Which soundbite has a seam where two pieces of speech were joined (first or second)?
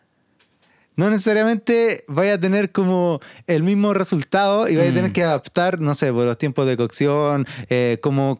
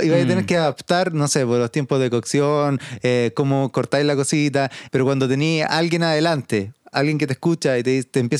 second